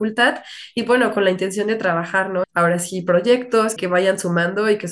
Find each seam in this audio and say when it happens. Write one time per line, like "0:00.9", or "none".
0:02.4
0:03.8